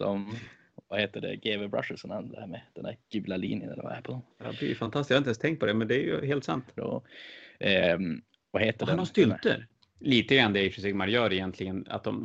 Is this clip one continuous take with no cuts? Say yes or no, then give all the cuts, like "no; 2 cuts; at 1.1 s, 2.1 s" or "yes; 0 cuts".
no; 3 cuts; at 4.3 s, 6.8 s, 9.8 s